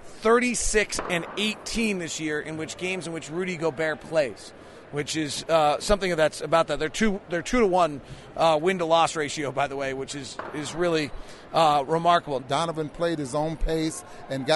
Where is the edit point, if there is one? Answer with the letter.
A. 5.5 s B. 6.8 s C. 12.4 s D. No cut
C